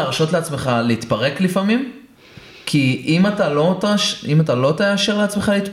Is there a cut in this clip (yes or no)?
no